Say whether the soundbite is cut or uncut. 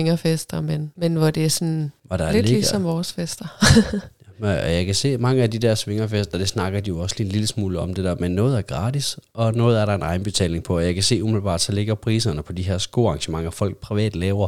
uncut